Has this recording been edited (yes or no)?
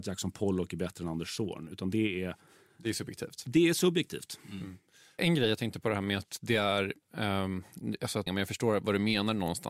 yes